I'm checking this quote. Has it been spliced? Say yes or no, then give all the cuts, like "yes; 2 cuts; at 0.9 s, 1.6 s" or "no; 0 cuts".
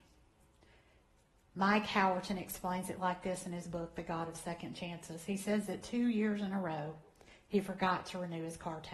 no; 0 cuts